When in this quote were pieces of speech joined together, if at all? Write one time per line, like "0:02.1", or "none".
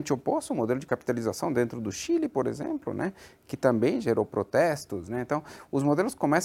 none